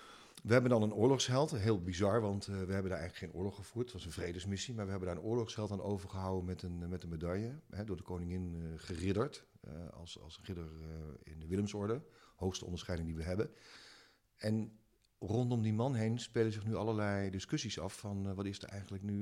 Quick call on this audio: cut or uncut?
uncut